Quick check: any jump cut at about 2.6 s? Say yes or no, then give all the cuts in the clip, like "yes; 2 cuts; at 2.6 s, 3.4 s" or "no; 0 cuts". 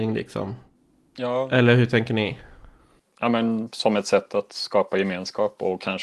no; 0 cuts